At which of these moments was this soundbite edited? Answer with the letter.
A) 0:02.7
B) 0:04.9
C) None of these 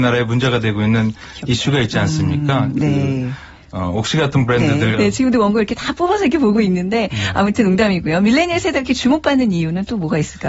B